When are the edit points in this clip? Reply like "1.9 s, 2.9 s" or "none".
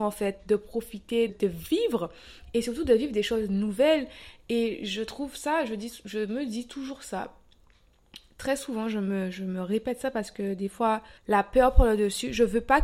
1.3 s, 11.2 s

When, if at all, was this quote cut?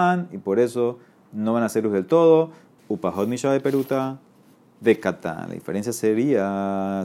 2.8 s

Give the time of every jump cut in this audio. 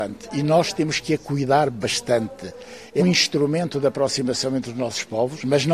3.0 s

